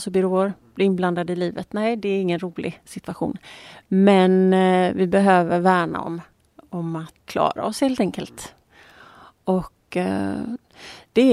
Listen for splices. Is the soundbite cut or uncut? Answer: cut